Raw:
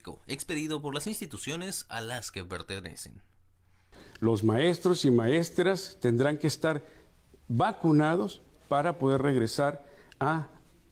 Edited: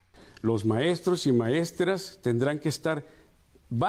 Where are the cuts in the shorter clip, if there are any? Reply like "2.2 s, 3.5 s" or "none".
none